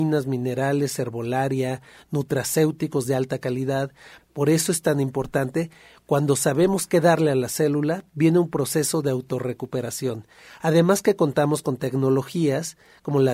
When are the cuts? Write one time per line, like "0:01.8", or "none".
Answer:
0:04.2